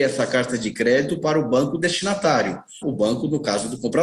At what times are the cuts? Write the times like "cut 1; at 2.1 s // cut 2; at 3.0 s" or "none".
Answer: cut 1; at 2.8 s